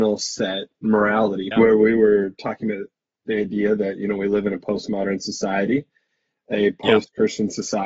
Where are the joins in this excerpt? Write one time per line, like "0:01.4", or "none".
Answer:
0:01.5
0:03.2